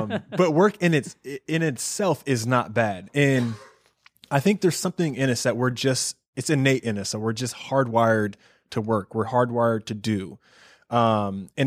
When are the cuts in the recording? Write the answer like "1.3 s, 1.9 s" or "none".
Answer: none

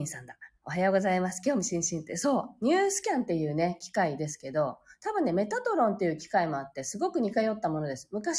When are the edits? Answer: none

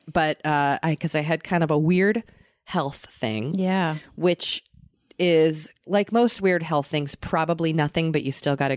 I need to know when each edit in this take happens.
none

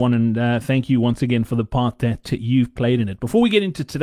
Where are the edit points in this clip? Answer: none

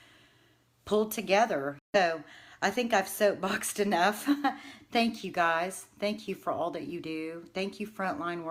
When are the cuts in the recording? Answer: 1.8 s

